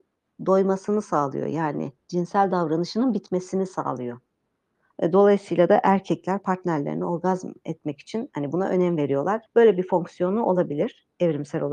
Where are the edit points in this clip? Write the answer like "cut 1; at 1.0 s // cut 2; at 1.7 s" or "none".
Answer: cut 1; at 4.9 s // cut 2; at 9.5 s